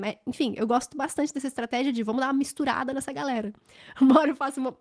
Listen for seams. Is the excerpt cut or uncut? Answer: uncut